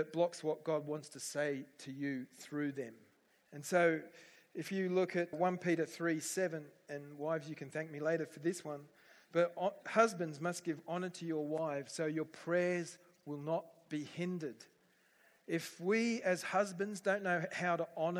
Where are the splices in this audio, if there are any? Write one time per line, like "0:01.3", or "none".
0:03.3
0:05.3